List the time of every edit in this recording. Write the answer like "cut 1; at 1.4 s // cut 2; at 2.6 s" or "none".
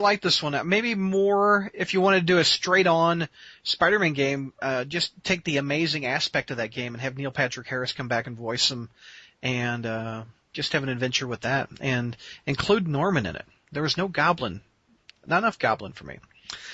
none

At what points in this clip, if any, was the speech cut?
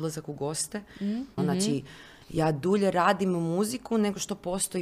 cut 1; at 1.4 s

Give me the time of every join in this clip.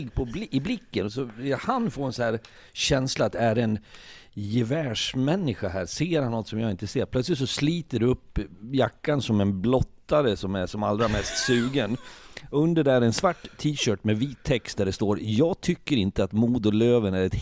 cut 1; at 1.1 s

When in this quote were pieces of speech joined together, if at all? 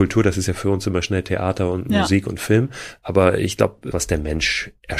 cut 1; at 3.9 s

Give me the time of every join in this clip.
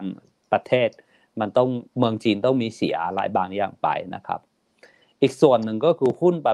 cut 1; at 1.9 s

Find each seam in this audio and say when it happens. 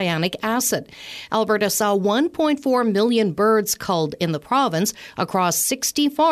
cut 1; at 1.3 s

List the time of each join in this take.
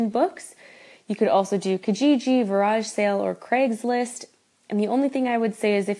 none

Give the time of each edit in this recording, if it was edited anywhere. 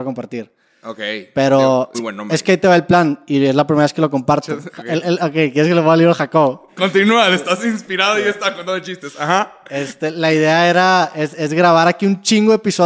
cut 1; at 1.9 s

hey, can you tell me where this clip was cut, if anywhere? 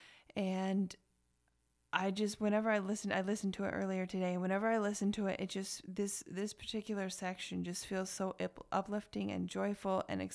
none

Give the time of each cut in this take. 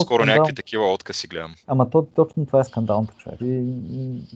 cut 1; at 1.6 s // cut 2; at 3.4 s

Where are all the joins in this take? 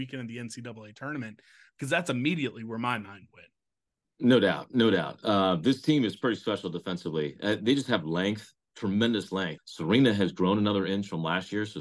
cut 1; at 9.6 s

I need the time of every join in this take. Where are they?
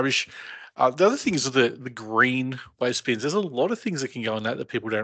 none

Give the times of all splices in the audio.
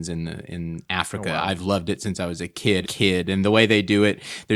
cut 1; at 2.8 s

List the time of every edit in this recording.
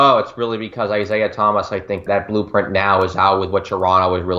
cut 1; at 2.1 s

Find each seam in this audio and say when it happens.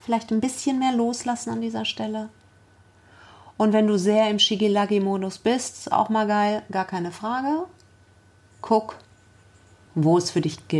none

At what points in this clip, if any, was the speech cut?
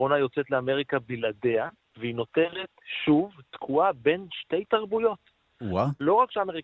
none

